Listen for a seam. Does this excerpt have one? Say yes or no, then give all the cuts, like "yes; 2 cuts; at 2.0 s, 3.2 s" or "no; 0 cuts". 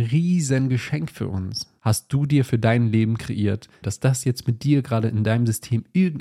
yes; 2 cuts; at 1.8 s, 3.8 s